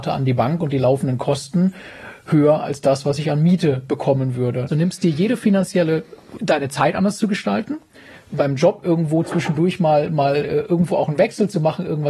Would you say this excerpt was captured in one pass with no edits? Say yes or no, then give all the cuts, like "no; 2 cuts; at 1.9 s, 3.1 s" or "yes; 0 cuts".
no; 2 cuts; at 4.7 s, 6.4 s